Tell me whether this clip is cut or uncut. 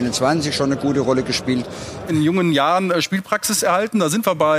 cut